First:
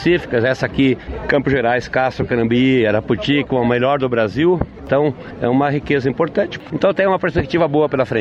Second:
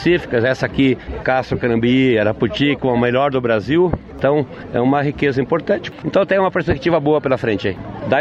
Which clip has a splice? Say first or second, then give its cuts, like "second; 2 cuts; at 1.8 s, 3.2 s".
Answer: second; 1 cut; at 1.2 s